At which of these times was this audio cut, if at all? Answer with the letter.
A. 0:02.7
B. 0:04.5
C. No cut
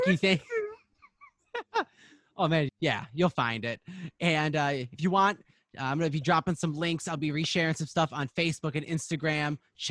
A